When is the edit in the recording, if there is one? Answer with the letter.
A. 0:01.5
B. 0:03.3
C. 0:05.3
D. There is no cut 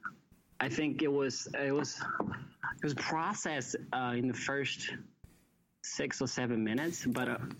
D